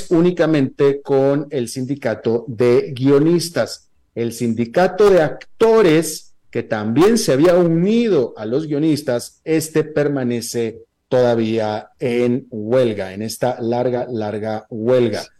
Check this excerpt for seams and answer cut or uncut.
uncut